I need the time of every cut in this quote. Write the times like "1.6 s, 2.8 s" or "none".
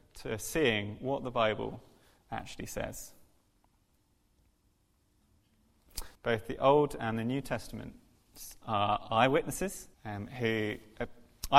6.1 s, 9.9 s